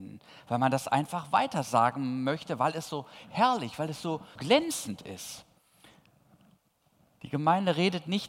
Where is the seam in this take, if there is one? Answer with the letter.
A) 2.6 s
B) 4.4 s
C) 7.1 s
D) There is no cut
B